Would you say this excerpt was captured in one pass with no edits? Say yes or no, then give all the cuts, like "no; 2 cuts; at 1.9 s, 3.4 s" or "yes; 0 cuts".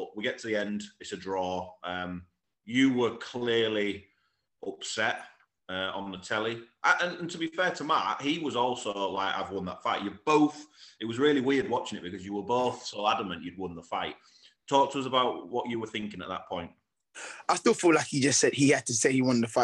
yes; 0 cuts